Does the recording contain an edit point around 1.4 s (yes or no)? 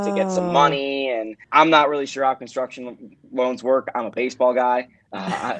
yes